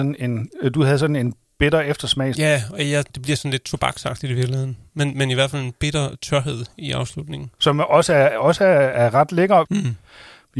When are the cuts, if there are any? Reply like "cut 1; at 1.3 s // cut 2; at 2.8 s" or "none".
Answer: cut 1; at 9.7 s